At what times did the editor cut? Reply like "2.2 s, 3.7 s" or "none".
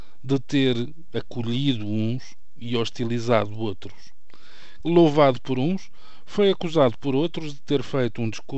4.8 s

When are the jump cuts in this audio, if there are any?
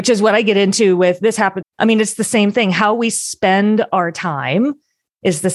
1.6 s

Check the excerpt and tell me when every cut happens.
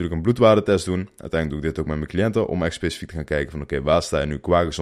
none

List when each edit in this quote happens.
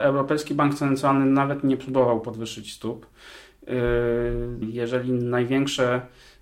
4.6 s

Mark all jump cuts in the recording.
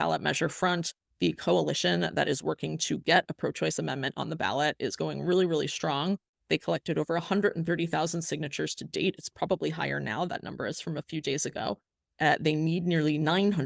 none

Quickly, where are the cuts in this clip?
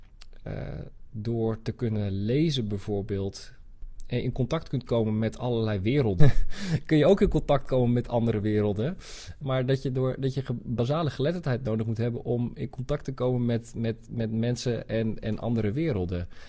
6.2 s, 9.4 s

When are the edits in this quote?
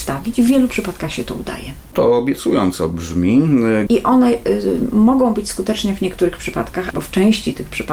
3.9 s, 6.9 s

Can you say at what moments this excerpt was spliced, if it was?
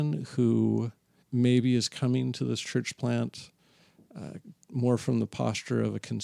1.2 s

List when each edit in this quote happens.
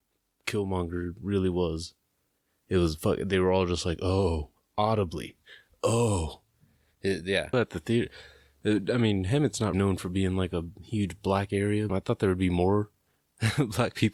7.5 s, 9.7 s, 11.9 s

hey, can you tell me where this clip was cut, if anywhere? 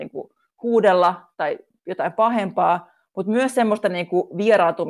none

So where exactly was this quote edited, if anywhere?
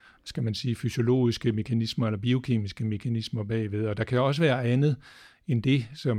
none

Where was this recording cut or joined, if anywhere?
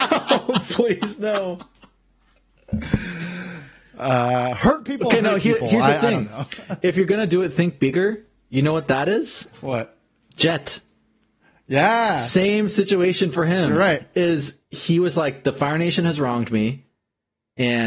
none

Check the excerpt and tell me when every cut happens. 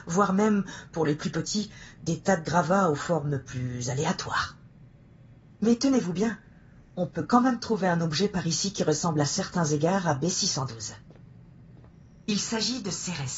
none

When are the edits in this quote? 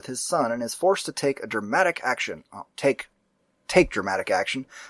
none

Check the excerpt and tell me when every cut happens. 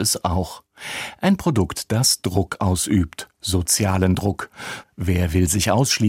4.8 s

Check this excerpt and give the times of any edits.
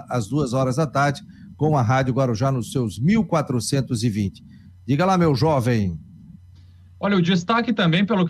none

